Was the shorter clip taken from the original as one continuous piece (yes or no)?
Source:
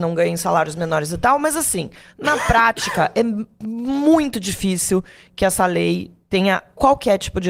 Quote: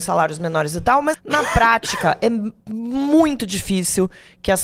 no